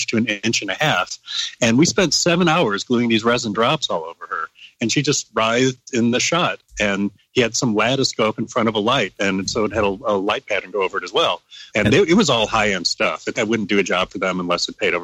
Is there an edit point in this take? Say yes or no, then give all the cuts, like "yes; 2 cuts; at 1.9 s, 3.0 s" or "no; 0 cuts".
yes; 2 cuts; at 11.7 s, 13.3 s